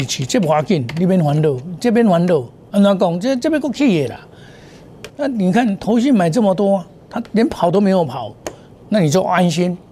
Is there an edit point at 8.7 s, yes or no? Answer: yes